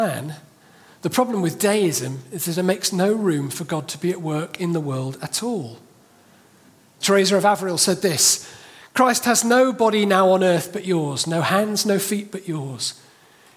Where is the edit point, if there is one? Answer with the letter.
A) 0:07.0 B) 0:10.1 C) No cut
A